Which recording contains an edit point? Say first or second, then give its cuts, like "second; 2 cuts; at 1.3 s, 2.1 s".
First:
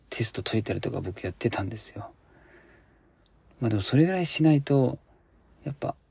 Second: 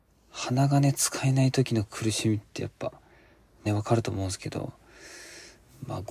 second; 1 cut; at 3.7 s